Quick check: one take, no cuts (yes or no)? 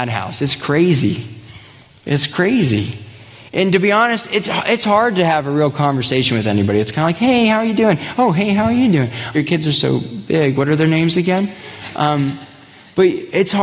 no